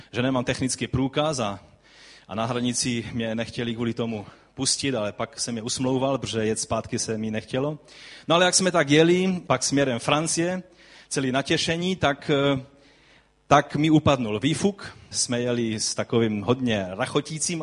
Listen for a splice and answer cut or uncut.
cut